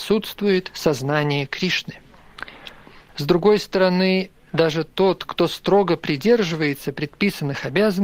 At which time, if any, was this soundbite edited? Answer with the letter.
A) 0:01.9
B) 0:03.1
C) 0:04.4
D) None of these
B